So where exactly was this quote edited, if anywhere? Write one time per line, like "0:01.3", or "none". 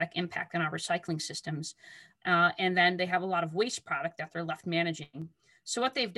0:02.2